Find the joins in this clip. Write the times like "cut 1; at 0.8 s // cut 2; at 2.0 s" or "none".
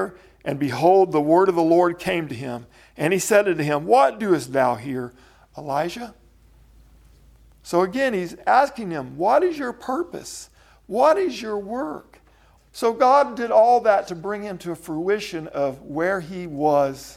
cut 1; at 12.6 s